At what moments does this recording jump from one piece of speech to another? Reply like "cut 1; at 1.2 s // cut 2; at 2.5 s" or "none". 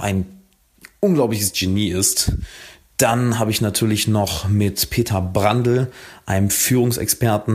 none